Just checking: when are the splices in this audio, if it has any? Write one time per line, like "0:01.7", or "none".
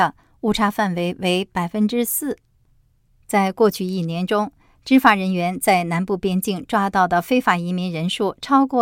0:03.2